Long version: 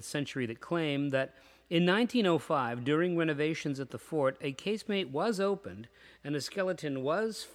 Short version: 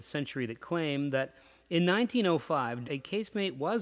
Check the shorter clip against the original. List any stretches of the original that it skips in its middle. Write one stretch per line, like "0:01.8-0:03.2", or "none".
0:02.8-0:04.4

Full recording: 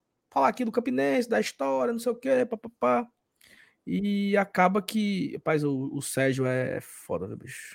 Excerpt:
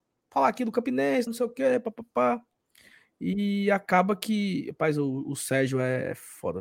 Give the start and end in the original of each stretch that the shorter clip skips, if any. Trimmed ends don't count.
0:01.3-0:01.9

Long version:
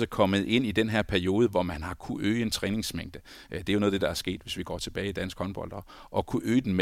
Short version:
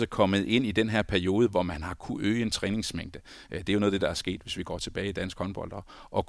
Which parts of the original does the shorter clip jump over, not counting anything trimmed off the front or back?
none

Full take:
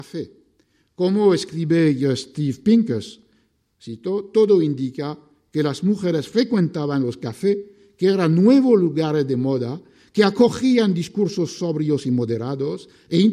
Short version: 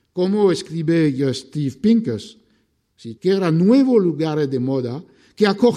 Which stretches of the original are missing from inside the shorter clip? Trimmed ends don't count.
0:04.0-0:07.9

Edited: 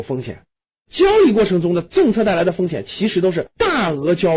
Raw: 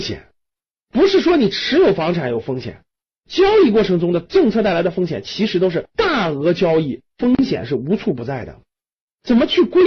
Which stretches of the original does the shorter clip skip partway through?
none

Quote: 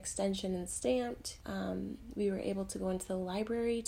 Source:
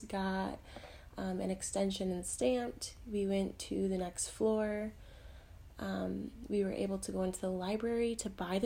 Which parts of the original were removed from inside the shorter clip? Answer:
0:03.0-0:05.7

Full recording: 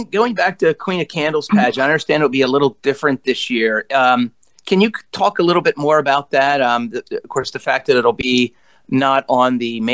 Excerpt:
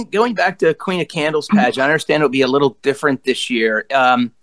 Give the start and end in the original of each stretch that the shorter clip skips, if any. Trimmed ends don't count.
none

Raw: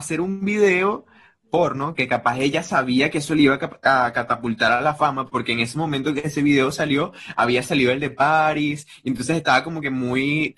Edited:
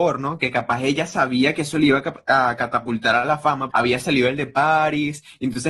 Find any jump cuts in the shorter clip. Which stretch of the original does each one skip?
0:05.3-0:07.3

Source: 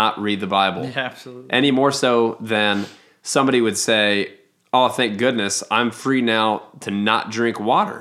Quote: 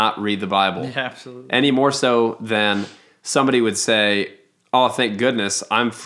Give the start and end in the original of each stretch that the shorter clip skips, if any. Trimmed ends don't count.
none

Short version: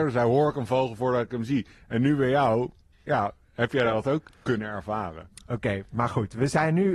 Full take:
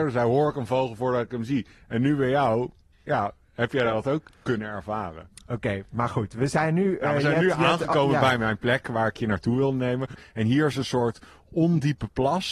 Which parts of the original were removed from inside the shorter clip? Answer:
none

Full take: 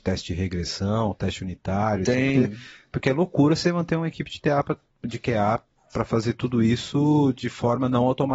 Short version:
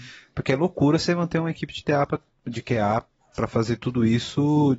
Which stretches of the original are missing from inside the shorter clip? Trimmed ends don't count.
none

